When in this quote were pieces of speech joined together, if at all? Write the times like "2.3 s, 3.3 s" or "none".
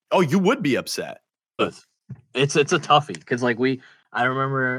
1.6 s